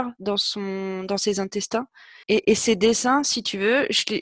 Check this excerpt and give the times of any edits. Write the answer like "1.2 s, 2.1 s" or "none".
2.2 s